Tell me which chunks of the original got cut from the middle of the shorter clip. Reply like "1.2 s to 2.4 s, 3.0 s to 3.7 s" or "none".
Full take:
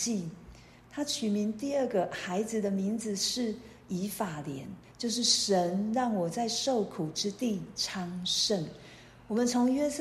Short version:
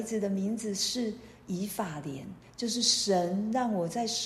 none